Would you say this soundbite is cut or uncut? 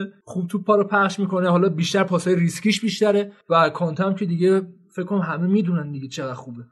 uncut